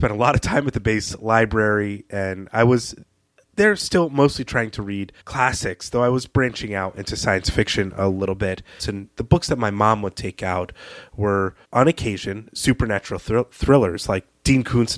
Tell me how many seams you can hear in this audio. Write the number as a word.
three